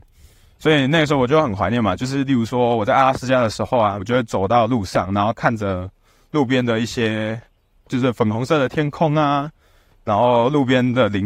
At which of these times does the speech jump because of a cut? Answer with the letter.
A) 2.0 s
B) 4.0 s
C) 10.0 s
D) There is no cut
B